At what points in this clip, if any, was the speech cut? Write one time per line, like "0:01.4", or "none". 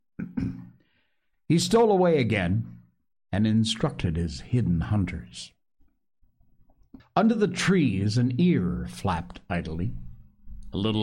0:07.0

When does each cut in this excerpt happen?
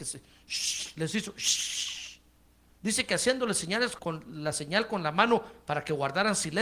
0:04.0

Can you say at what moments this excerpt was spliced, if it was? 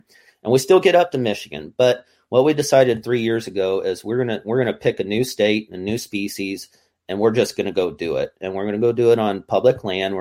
none

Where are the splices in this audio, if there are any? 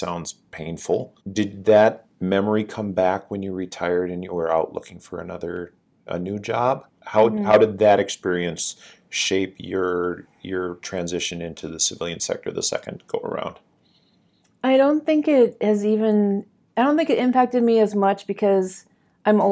0:01.2
0:07.0

